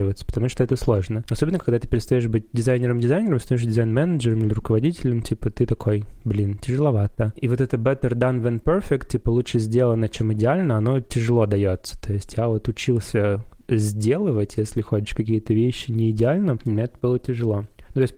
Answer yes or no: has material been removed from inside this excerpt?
yes